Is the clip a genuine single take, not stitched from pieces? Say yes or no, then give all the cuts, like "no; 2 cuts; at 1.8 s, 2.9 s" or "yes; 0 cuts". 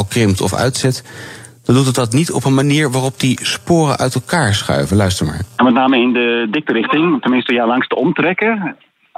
yes; 0 cuts